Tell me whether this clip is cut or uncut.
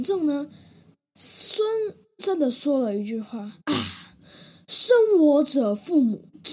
cut